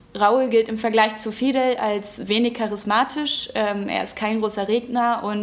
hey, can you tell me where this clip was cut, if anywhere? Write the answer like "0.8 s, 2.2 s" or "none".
none